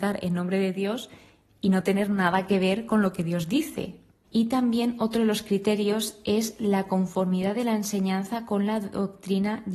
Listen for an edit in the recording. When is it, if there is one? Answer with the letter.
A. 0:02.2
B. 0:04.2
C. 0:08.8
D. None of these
B